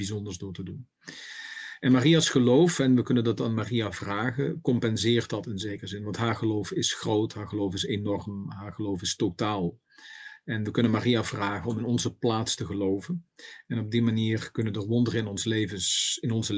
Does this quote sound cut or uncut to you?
uncut